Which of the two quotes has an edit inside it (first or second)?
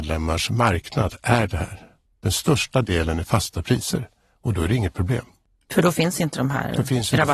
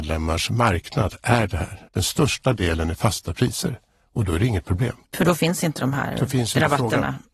second